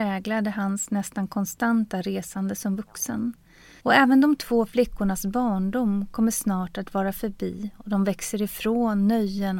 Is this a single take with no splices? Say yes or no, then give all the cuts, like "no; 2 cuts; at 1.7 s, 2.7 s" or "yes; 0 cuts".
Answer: no; 1 cut; at 3.8 s